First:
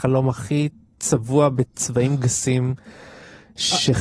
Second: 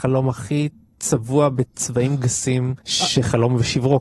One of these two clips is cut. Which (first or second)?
second